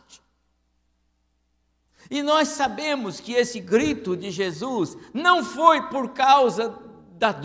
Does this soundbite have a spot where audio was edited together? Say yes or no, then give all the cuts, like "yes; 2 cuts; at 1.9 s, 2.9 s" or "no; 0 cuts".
no; 0 cuts